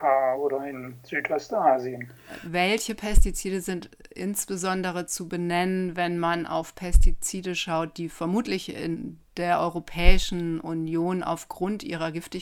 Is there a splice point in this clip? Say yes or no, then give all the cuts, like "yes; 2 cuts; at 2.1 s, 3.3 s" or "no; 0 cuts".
no; 0 cuts